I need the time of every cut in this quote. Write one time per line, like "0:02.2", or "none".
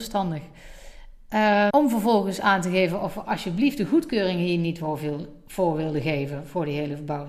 0:01.7

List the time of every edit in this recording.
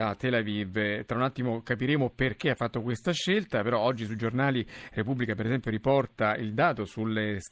none

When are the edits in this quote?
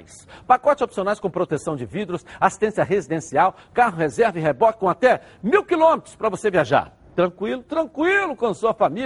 0:07.6

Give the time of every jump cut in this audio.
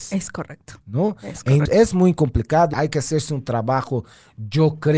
0:01.7
0:02.7

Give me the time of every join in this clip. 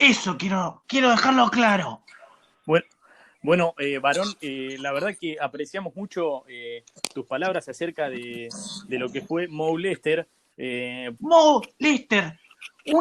0:11.2

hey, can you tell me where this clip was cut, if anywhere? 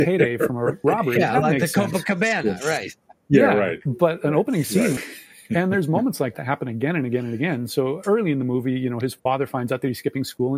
0:05.0
0:06.3

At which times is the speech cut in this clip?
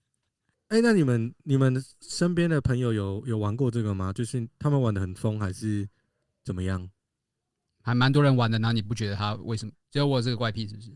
0:07.7
0:09.7

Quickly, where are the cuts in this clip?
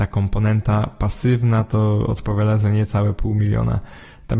none

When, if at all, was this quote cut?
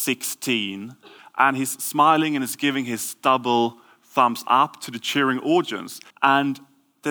0:01.2
0:06.1

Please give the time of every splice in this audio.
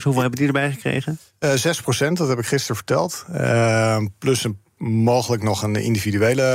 none

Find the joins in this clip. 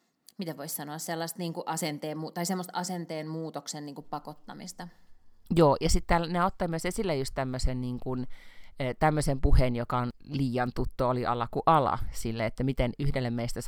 none

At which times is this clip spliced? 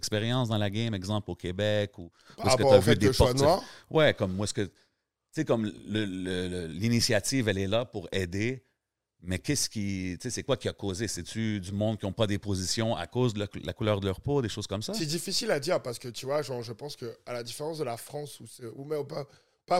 none

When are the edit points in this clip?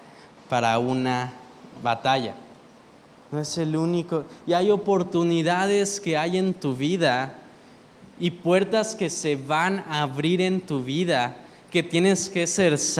0:03.1

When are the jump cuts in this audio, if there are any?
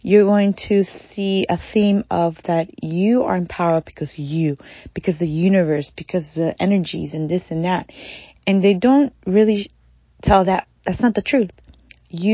none

